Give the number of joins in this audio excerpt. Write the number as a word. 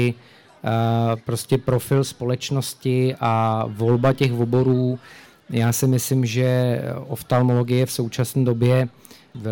one